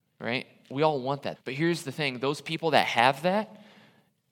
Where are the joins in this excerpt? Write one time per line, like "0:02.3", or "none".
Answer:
0:01.4